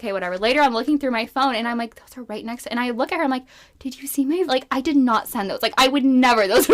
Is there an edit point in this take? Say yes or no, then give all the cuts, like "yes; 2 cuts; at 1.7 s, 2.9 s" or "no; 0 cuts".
yes; 1 cut; at 4.5 s